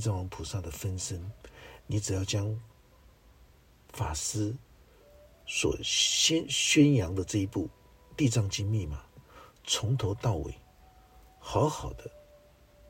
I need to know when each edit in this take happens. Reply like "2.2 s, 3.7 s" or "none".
none